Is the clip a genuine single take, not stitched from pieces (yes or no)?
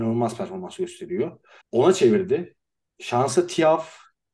no